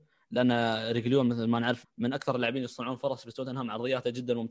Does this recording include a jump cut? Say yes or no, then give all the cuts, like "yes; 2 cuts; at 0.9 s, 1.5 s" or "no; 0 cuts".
yes; 1 cut; at 1.8 s